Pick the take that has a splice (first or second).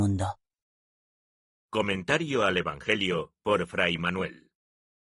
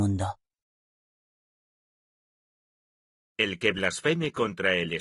first